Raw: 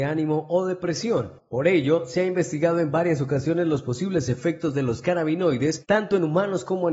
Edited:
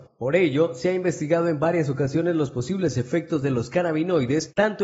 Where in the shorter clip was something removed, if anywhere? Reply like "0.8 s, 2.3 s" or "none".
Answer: none